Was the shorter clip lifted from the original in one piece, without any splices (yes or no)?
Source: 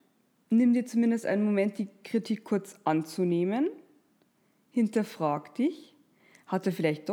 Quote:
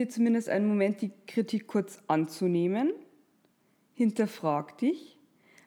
yes